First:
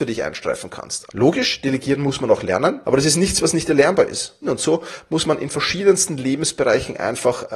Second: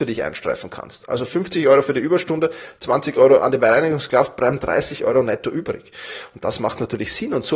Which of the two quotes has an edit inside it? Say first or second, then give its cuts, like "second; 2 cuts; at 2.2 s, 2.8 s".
first; 3 cuts; at 1.1 s, 2.8 s, 4.4 s